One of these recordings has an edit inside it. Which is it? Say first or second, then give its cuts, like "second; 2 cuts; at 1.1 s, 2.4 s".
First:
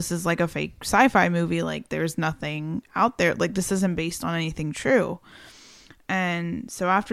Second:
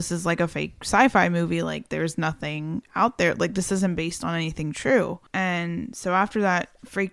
second; 1 cut; at 5.3 s